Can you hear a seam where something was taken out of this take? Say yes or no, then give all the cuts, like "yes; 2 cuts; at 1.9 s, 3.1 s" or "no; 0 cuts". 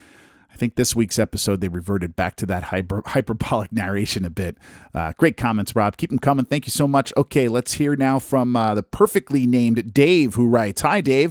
no; 0 cuts